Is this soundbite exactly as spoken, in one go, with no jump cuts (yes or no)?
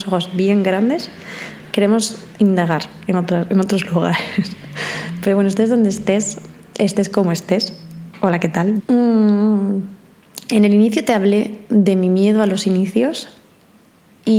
no